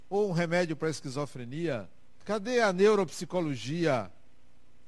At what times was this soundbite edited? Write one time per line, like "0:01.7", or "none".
0:02.2